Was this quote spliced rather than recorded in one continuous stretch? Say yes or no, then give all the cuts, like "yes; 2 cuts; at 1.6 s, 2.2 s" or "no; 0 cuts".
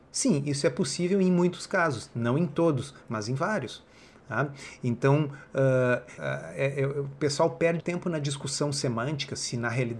yes; 2 cuts; at 6.2 s, 7.8 s